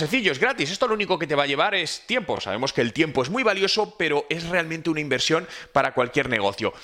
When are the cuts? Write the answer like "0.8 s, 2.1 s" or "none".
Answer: none